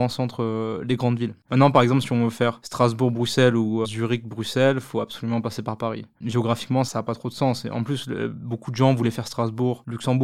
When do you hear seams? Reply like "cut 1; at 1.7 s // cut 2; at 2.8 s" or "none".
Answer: cut 1; at 1.4 s // cut 2; at 3.8 s